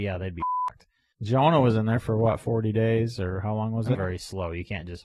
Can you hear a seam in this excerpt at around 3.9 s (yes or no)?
yes